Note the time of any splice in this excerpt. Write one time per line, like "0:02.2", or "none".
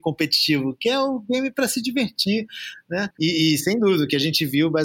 0:03.1